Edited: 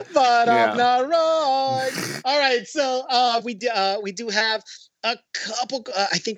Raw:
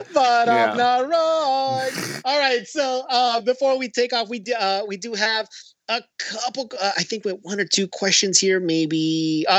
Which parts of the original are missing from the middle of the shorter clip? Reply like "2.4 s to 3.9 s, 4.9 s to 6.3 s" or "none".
3.4 s to 4.3 s